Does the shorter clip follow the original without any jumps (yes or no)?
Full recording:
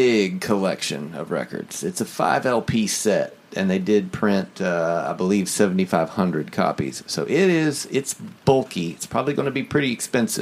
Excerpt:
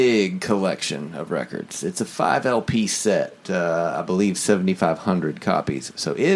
no